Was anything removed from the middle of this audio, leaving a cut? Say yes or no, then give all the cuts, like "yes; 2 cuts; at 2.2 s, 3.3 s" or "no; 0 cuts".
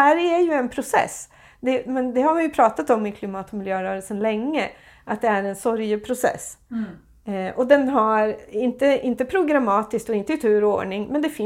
no; 0 cuts